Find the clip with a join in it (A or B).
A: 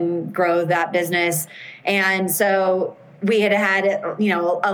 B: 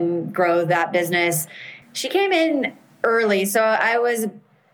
B